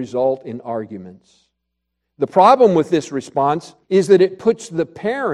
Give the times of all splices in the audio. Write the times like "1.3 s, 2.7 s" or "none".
3.8 s

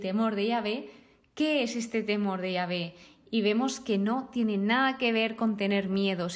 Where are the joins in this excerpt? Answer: none

